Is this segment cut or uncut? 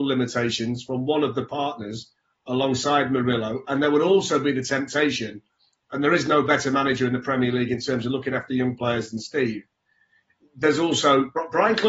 uncut